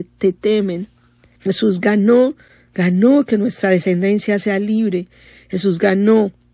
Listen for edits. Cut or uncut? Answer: cut